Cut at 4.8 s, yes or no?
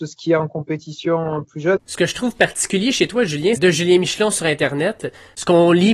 no